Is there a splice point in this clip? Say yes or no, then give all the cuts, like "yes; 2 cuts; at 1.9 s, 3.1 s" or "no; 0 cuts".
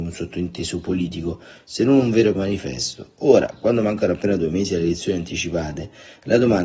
yes; 1 cut; at 2.3 s